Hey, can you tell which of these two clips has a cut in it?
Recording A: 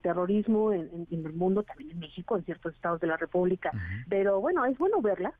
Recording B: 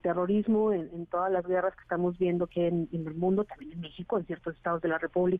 A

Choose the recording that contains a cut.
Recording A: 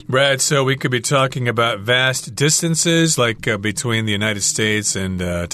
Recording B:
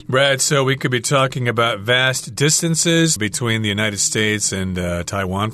B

